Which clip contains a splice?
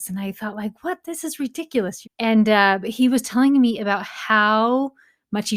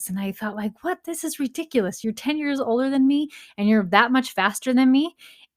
first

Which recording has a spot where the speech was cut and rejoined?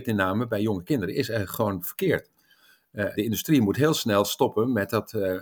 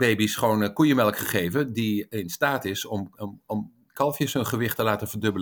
first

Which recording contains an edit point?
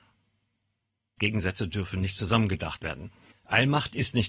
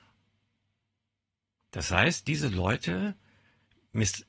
first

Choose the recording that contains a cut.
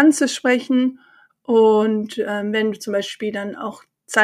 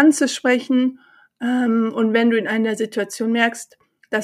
first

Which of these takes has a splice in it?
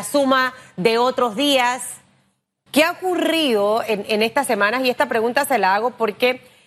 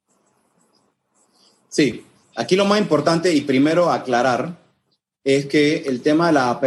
first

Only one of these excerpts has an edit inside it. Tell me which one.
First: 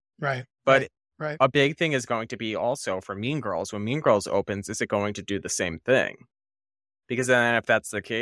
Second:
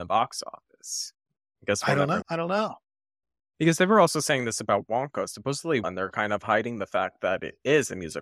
second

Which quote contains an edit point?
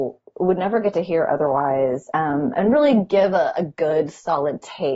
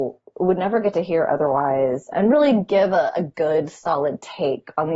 second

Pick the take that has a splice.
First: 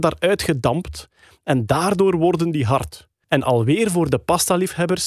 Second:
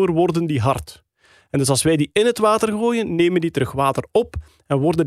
first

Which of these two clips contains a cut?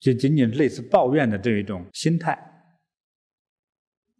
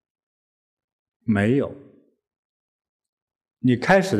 first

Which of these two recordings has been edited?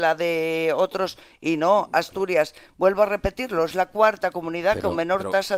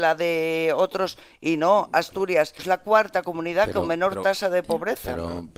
second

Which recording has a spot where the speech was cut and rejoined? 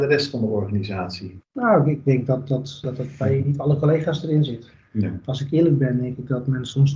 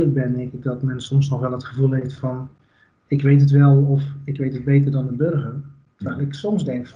first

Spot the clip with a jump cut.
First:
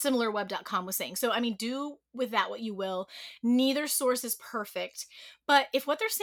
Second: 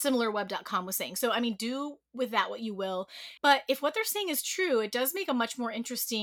second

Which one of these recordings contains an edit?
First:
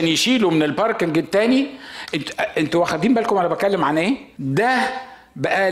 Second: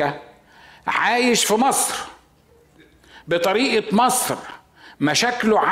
first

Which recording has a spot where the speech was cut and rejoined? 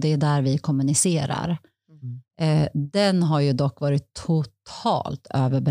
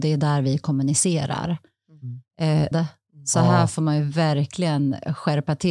second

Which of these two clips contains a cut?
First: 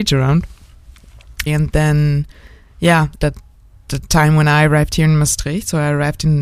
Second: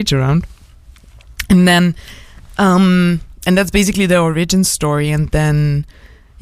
first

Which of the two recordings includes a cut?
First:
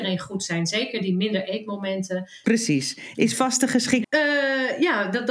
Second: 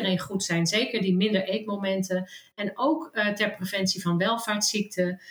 first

